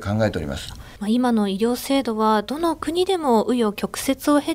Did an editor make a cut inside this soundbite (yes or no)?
no